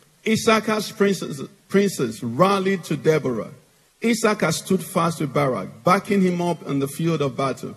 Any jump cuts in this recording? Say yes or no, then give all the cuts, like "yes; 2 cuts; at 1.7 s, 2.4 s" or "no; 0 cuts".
no; 0 cuts